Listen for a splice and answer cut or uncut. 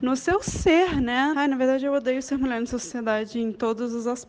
cut